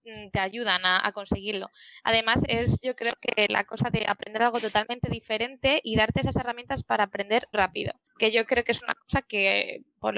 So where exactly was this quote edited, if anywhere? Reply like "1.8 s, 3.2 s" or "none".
2.5 s, 7.5 s